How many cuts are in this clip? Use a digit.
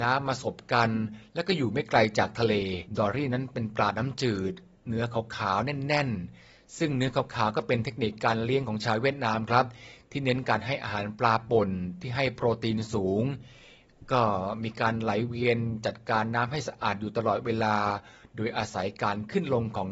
1